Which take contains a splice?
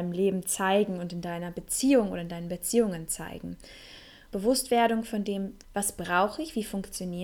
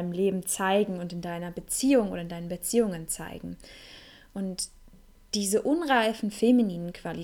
first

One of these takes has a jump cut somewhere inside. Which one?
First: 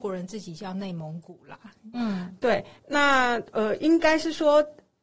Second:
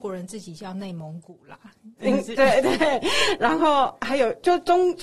first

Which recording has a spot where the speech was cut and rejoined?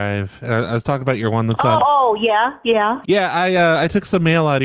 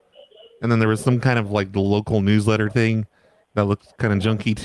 first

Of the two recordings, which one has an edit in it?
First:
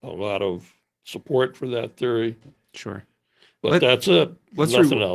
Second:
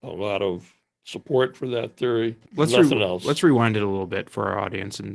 second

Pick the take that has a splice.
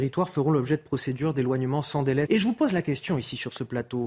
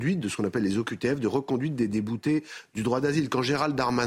first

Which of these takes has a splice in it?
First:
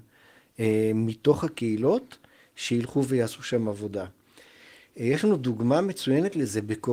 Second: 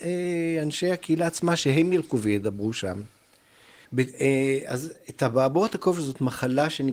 second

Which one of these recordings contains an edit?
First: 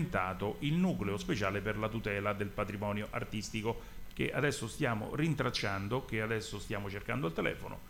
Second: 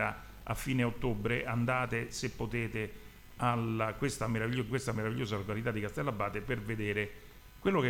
first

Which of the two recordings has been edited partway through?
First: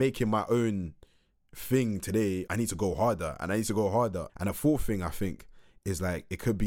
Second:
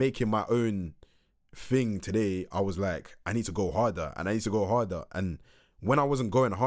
first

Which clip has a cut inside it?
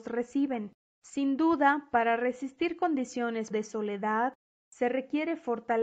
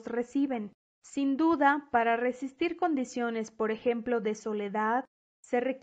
first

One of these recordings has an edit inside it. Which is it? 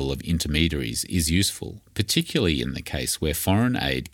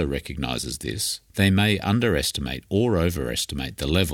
second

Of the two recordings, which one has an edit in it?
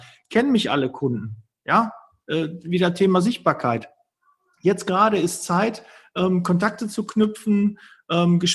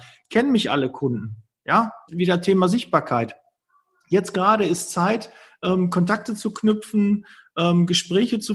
second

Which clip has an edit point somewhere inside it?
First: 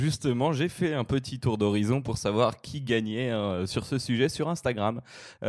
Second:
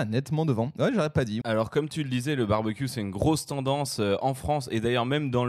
second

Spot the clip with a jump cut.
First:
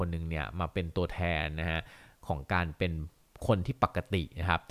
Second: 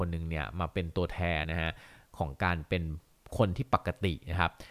second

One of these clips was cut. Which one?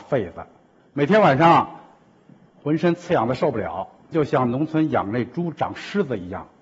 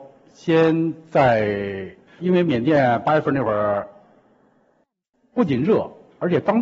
second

